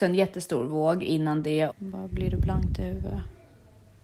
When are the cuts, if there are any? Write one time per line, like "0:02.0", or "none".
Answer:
0:01.7